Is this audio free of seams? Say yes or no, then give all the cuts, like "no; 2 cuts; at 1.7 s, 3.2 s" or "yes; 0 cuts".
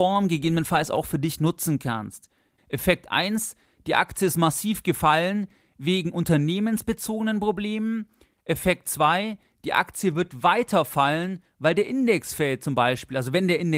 no; 1 cut; at 2.6 s